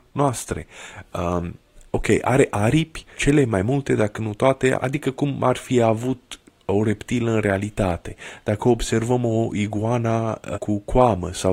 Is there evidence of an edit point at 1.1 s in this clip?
no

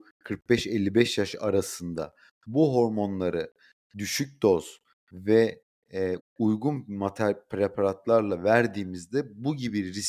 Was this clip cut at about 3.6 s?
no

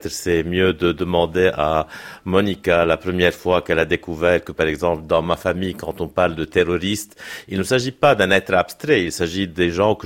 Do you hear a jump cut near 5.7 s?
no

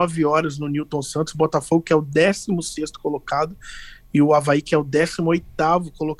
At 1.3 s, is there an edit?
no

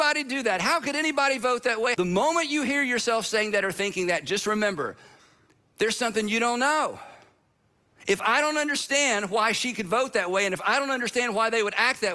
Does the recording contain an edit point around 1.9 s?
yes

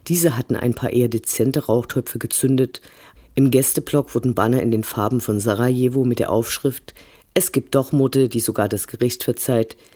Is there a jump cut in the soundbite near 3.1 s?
yes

